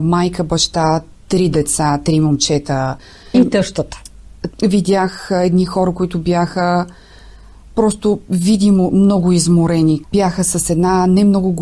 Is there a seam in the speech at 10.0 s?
yes; 2 cuts; at 4.5 s, 10.0 s

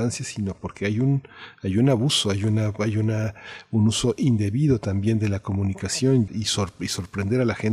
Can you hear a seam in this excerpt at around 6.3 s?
yes; 1 cut; at 6.3 s

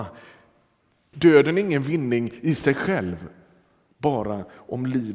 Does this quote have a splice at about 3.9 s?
no; 1 cut; at 1.1 s

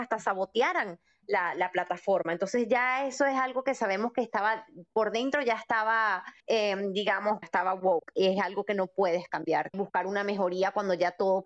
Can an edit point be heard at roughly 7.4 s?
yes; 3 cuts; at 6.4 s, 7.4 s, 9.7 s

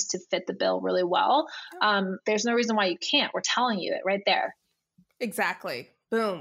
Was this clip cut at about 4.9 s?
no; 1 cut; at 2.2 s

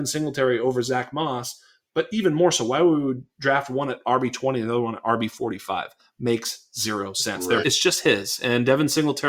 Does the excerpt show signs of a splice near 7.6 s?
yes; 1 cut; at 7.6 s

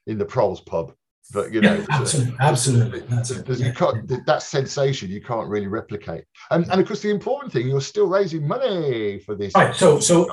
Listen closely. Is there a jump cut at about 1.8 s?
no; 0 cuts

